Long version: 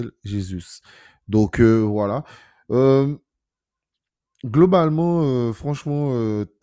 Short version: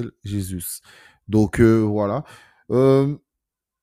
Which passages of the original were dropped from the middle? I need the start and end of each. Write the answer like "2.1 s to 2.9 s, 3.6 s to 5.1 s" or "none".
none